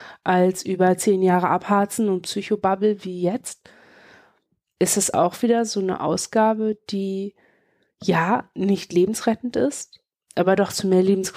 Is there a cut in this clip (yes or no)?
no